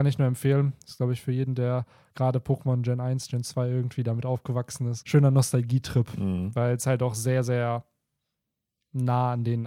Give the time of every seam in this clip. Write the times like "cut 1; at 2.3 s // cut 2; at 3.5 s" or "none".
cut 1; at 5.0 s